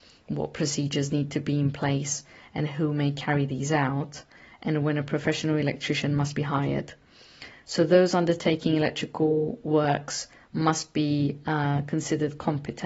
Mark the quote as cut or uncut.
uncut